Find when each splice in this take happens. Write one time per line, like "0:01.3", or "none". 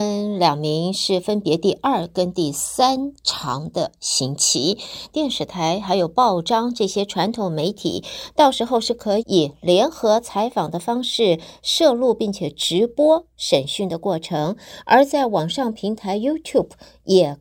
0:05.1
0:09.2